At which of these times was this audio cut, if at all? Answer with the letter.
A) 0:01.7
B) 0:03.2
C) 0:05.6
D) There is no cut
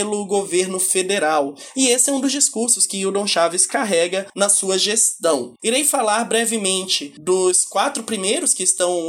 C